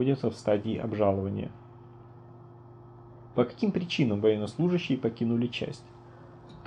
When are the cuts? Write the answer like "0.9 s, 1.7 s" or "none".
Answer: none